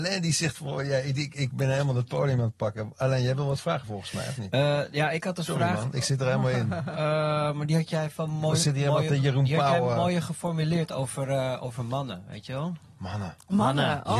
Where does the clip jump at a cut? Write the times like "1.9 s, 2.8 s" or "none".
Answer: none